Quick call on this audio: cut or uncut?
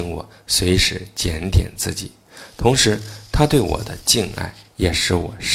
uncut